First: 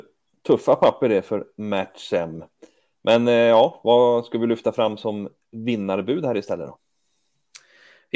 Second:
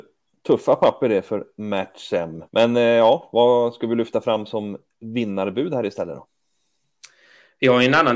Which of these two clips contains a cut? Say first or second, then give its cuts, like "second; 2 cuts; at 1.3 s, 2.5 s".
second; 1 cut; at 2.5 s